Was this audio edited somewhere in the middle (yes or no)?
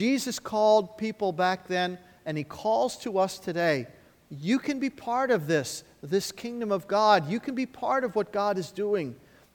no